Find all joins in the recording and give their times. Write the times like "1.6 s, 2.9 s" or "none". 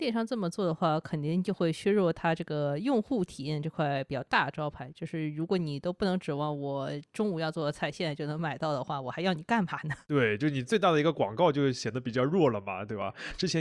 none